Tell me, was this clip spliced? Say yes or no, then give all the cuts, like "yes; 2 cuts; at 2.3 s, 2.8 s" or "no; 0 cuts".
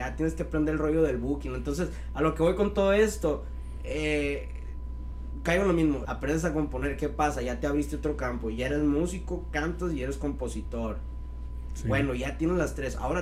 yes; 1 cut; at 6.0 s